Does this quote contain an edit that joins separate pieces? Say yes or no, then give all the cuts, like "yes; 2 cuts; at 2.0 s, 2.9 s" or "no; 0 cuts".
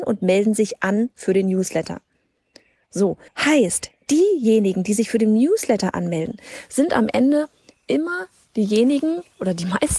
yes; 1 cut; at 3.3 s